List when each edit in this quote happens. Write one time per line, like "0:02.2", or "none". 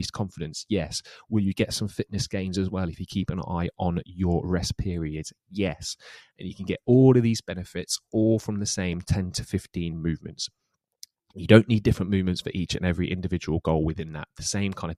none